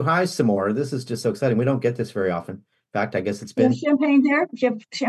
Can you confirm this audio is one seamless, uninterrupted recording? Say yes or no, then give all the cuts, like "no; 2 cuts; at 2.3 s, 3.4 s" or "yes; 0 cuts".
yes; 0 cuts